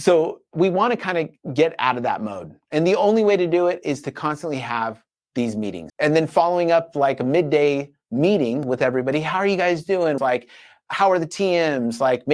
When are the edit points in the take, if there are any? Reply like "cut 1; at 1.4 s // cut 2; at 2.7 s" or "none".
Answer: cut 1; at 5.9 s // cut 2; at 10.2 s